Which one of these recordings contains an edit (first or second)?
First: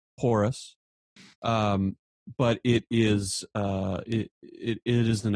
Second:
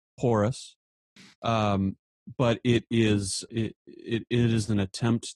second